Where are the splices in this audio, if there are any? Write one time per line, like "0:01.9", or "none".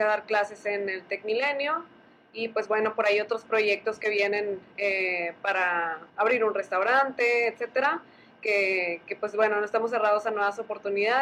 0:06.1